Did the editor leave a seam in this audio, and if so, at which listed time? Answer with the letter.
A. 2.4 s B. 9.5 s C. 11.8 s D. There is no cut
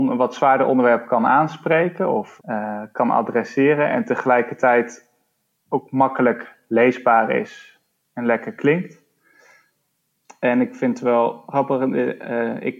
A